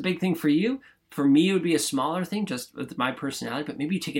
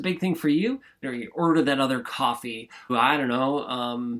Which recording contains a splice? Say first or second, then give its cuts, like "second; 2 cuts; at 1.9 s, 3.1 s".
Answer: second; 2 cuts; at 1.0 s, 2.9 s